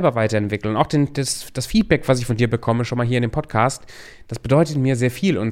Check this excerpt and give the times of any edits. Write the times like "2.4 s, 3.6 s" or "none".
none

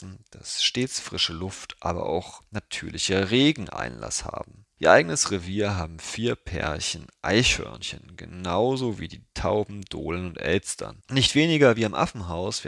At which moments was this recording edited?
11.0 s

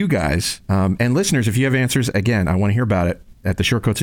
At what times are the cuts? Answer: none

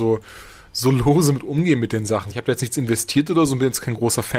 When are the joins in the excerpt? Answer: 2.3 s

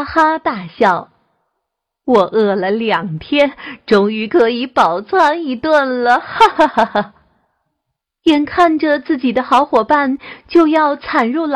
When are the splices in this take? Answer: none

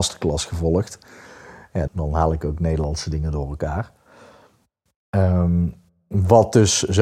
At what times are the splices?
1.9 s

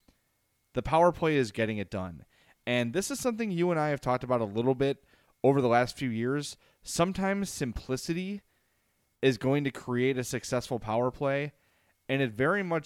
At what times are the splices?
none

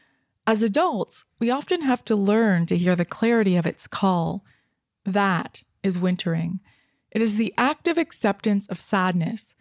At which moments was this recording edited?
none

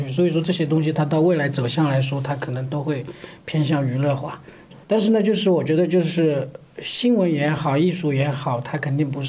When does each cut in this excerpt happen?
4.8 s

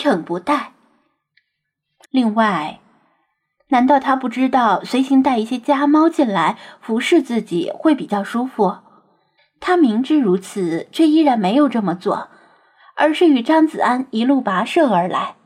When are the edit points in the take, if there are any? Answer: 2.0 s, 9.4 s

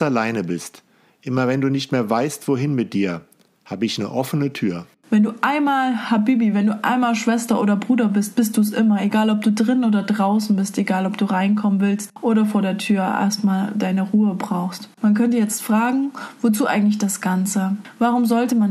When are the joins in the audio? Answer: none

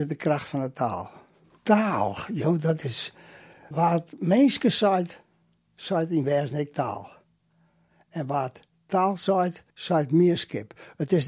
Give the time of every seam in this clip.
1.5 s, 9.7 s

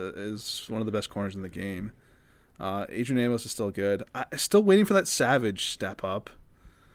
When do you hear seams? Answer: none

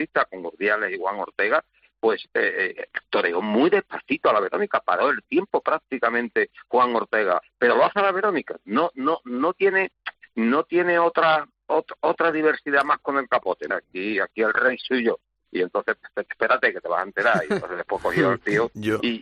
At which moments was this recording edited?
2.3 s, 13.7 s

